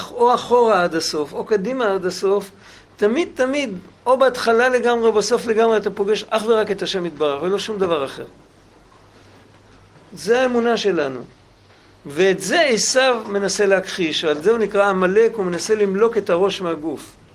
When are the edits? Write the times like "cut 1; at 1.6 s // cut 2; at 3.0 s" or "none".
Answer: none